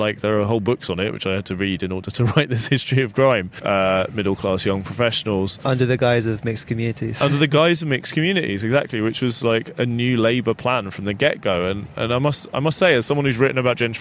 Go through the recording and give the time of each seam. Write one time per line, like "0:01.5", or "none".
0:03.6

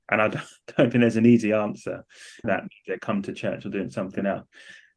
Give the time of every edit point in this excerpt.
0:02.4

